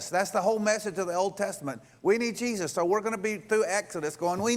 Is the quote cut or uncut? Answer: uncut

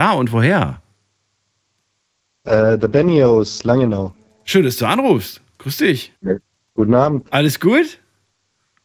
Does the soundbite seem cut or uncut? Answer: cut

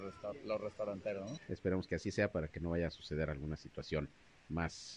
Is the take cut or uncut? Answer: cut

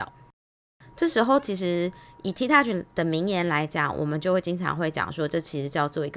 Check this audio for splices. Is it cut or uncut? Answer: uncut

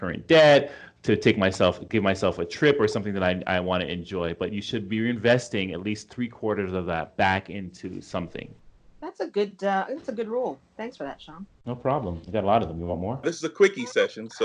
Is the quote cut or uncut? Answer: cut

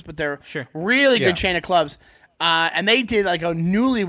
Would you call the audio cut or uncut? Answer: uncut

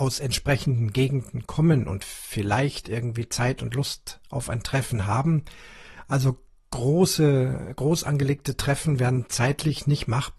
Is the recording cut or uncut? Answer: uncut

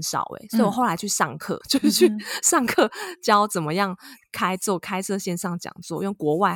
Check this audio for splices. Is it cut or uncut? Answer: cut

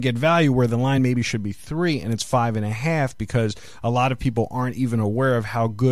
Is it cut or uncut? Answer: uncut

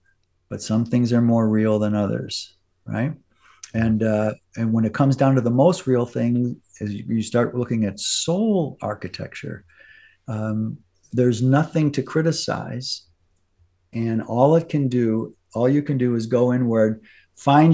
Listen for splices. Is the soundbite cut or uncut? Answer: uncut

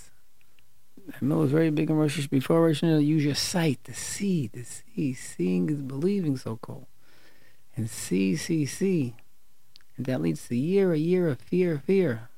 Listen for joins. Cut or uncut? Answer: cut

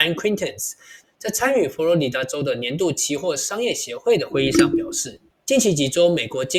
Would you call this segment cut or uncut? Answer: uncut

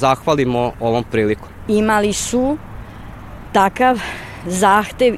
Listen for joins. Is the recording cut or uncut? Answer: cut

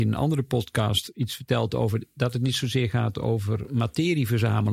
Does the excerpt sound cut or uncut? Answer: uncut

